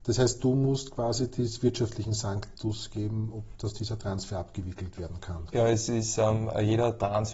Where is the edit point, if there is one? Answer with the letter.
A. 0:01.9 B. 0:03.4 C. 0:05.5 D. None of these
C